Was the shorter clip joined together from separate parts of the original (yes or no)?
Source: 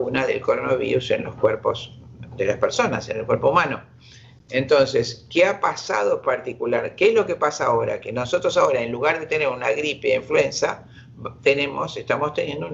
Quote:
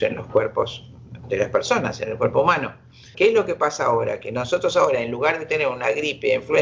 yes